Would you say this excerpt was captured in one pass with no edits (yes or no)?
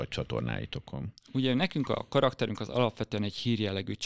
yes